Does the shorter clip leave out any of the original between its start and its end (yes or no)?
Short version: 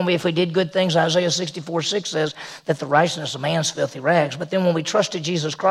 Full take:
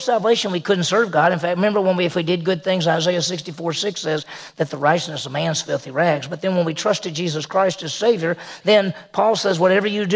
no